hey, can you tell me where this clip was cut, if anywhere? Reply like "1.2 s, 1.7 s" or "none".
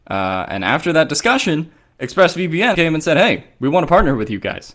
2.7 s